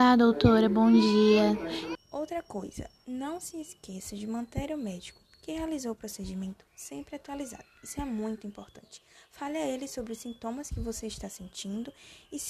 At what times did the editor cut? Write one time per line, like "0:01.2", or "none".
0:02.0